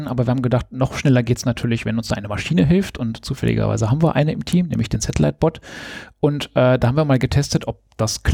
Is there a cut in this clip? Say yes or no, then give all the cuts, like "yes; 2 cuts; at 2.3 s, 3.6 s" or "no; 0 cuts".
no; 0 cuts